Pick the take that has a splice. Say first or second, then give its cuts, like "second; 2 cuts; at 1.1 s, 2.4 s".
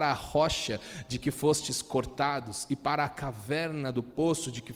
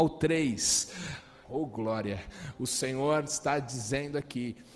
second; 1 cut; at 1.4 s